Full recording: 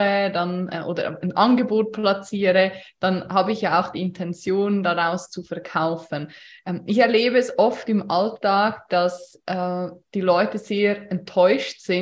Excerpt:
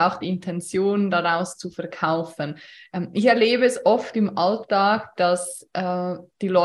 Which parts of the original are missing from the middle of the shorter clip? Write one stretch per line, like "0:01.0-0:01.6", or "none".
none